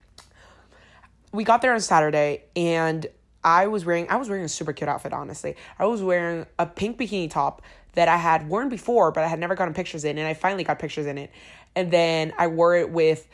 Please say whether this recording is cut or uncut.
uncut